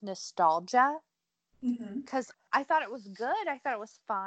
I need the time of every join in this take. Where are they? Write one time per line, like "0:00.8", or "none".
0:02.3